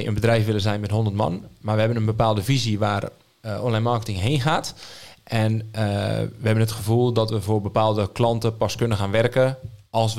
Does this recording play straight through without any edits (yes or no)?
yes